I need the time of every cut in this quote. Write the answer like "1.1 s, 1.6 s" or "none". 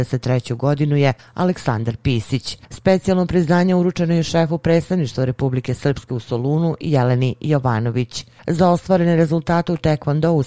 2.7 s